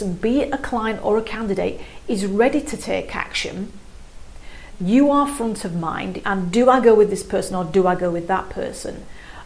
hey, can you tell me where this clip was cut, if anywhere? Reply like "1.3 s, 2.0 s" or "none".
4.7 s, 6.2 s